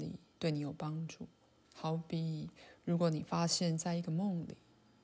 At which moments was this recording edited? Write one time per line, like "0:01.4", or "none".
0:01.6